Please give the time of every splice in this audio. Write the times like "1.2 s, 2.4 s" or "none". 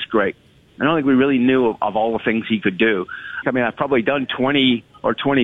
3.4 s